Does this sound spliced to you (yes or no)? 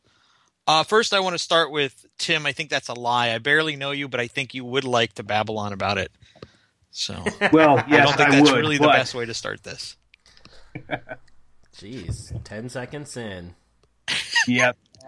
no